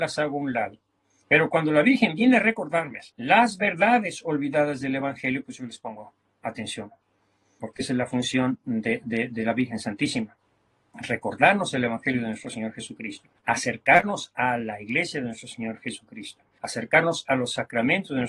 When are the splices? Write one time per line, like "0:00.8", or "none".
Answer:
0:01.2
0:03.1